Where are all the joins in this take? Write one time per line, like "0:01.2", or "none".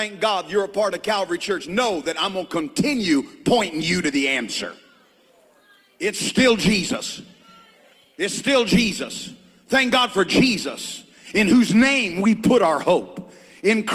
none

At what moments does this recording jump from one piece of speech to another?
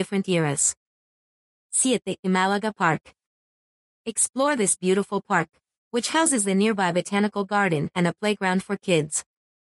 none

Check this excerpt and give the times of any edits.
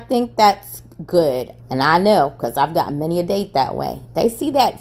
0:01.6

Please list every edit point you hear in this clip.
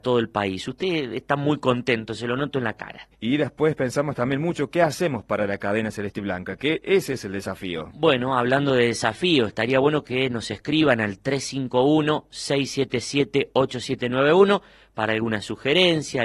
0:03.1

